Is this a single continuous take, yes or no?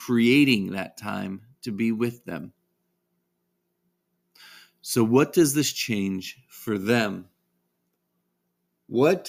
yes